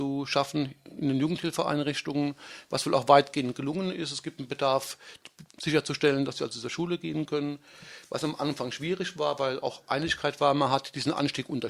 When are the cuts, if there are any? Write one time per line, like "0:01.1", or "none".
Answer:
0:05.5